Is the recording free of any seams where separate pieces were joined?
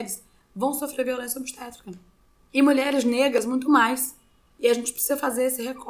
yes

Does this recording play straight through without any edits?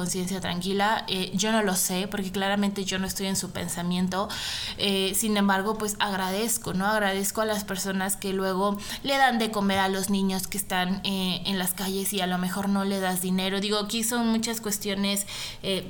yes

